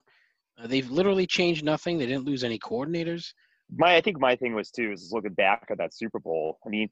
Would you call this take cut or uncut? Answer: cut